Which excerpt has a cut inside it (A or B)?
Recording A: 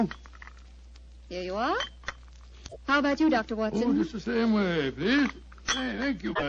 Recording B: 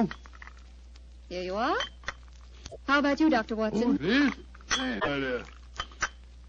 B